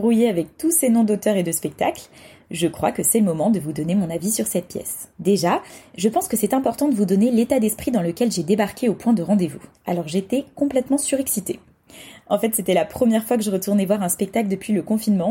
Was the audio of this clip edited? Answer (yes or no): yes